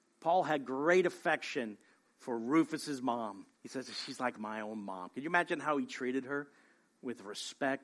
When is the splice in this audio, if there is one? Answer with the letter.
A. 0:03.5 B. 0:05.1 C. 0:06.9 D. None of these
A